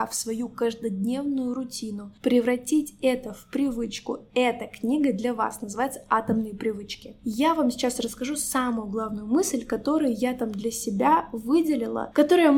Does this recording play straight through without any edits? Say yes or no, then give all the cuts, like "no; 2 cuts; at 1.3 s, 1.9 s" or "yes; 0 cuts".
yes; 0 cuts